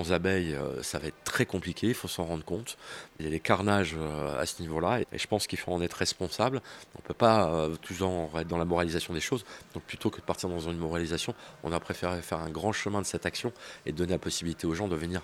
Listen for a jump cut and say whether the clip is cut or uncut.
cut